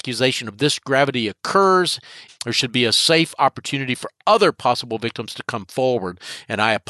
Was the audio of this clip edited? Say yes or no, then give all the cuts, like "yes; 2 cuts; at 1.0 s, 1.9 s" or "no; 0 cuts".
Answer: yes; 1 cut; at 2.3 s